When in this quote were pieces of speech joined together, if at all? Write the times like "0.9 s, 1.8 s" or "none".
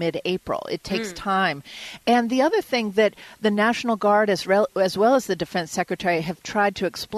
none